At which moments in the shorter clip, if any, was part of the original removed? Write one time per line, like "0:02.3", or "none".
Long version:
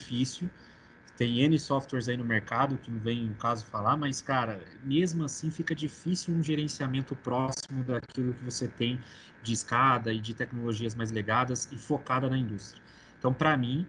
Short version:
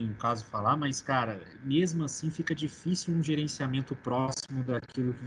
none